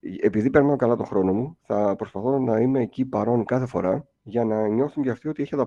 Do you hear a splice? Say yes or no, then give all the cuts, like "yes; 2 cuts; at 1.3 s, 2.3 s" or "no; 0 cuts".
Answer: yes; 1 cut; at 4.2 s